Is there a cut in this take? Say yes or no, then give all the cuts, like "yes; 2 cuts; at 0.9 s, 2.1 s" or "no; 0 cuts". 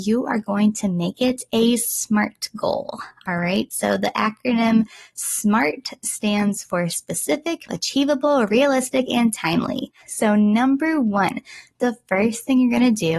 yes; 2 cuts; at 7.7 s, 10.0 s